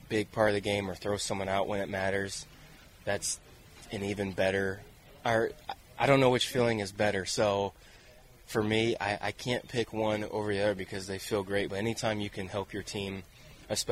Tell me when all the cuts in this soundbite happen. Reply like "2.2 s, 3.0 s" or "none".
none